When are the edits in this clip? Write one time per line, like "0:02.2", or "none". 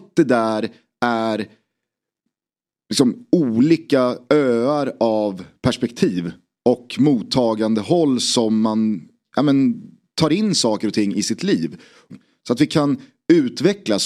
0:12.1